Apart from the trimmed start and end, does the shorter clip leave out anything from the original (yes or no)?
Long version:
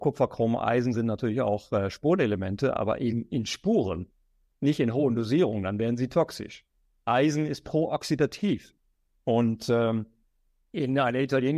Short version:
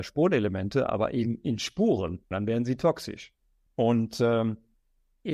yes